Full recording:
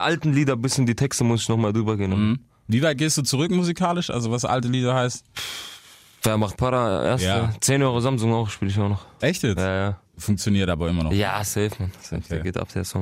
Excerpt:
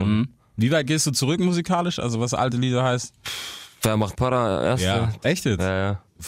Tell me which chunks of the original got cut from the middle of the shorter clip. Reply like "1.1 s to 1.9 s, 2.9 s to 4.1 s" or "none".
5.8 s to 6.1 s, 7.6 s to 9.2 s